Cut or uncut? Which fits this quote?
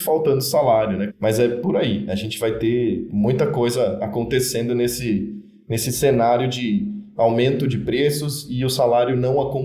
cut